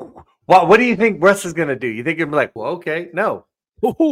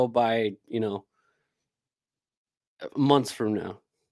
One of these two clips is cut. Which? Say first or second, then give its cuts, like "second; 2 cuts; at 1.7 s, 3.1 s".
first; 1 cut; at 2.6 s